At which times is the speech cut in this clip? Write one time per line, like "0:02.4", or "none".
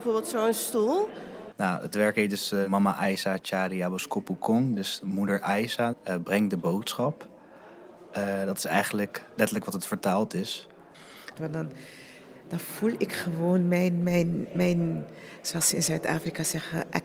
0:01.5
0:05.9
0:11.3